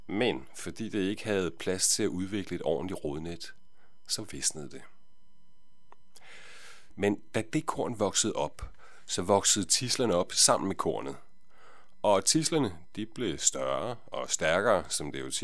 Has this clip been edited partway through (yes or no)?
yes